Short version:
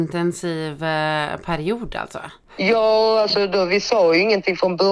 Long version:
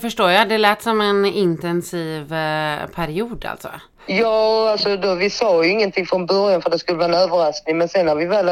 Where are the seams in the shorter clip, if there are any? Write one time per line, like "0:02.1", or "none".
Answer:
none